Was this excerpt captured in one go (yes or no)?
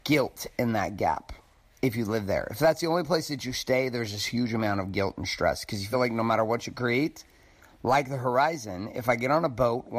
yes